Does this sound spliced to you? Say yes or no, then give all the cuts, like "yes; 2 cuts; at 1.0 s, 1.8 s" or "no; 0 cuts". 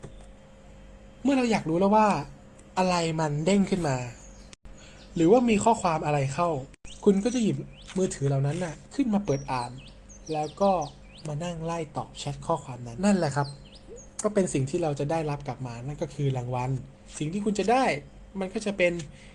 yes; 1 cut; at 13.0 s